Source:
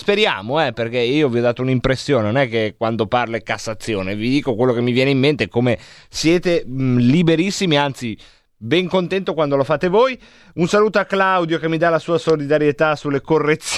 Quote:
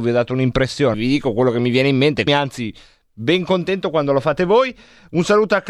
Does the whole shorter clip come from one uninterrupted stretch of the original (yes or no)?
no